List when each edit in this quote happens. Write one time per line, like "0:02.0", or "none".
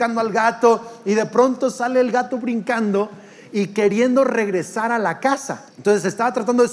0:05.7